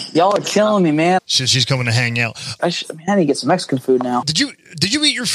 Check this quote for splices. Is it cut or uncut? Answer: cut